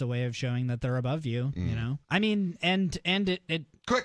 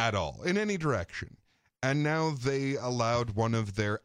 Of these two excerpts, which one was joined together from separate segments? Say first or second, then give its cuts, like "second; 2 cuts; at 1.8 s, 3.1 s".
first; 1 cut; at 2.0 s